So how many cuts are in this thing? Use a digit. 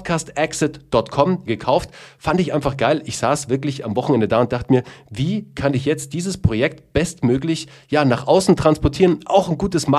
1